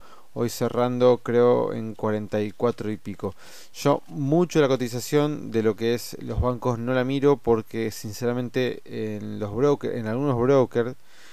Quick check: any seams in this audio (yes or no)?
no